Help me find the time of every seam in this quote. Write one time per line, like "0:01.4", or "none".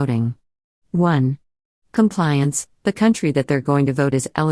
none